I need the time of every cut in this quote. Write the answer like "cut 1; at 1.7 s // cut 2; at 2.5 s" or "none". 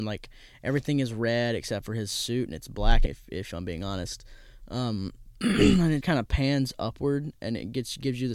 cut 1; at 3.1 s // cut 2; at 6.0 s